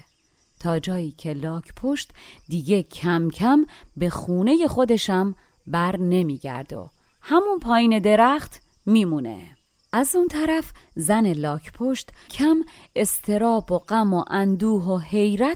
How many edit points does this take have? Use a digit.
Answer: 2